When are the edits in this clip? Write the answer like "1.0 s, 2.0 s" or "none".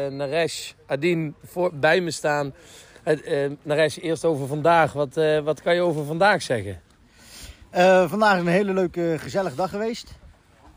none